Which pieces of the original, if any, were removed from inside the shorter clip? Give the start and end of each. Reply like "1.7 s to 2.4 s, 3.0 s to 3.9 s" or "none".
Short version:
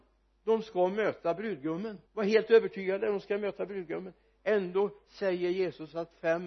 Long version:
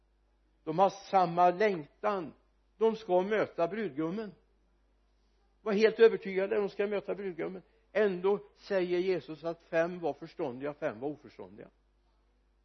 4.4 s to 5.5 s